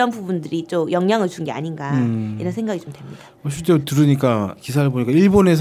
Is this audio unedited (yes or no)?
yes